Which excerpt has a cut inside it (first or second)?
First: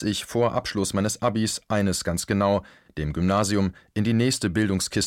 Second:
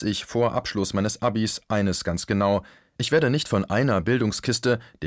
first